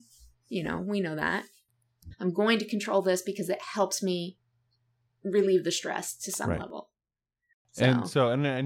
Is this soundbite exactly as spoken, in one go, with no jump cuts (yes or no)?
no